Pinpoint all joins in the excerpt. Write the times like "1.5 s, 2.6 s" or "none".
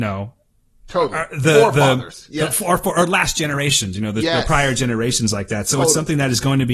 none